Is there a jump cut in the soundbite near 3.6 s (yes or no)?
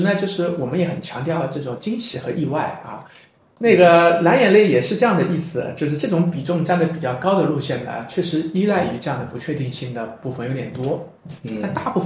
yes